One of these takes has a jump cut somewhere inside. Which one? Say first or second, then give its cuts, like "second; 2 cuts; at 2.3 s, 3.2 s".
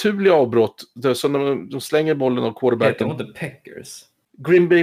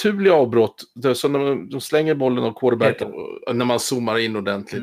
second; 1 cut; at 3.0 s